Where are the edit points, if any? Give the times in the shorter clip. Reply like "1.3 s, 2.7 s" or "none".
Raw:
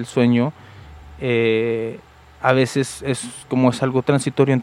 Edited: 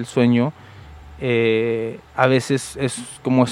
2.1 s

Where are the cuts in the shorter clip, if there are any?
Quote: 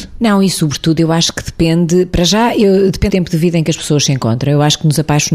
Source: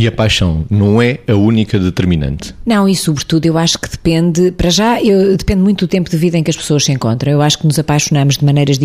3.1 s

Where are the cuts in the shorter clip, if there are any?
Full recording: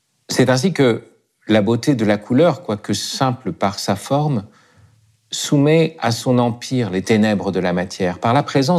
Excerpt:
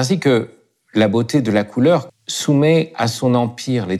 2.1 s

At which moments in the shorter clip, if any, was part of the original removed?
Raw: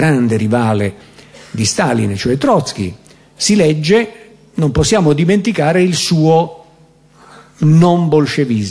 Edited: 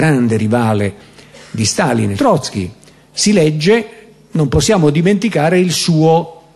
2.2 s

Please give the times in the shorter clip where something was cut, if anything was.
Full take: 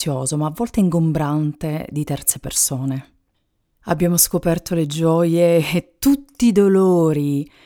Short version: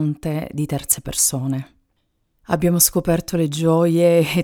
none

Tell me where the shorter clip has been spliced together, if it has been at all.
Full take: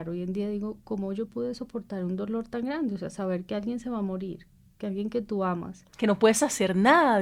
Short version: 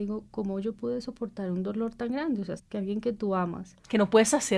2.6 s

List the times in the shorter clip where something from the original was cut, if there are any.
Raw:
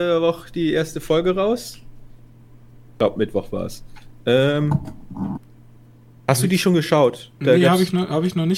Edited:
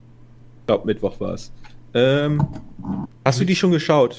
3.1 s

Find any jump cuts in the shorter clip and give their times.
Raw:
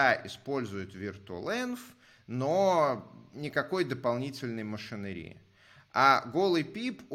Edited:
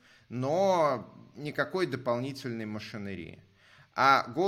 none

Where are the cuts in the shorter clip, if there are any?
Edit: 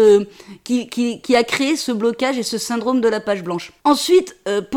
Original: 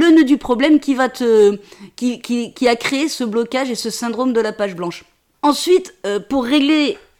3.8 s

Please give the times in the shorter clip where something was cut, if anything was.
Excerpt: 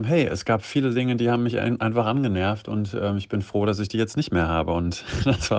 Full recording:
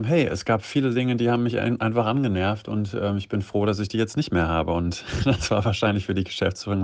none

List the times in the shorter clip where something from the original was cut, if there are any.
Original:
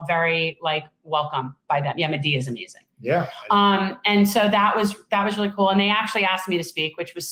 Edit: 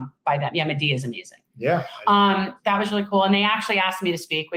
2.6 s

